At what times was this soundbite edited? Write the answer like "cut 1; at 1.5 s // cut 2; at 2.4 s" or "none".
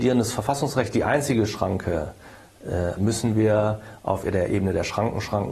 cut 1; at 3.0 s